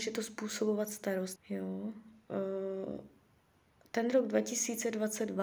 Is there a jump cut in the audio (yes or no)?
yes